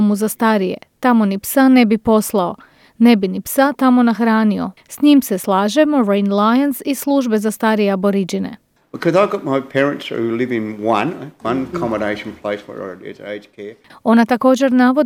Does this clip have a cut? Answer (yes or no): yes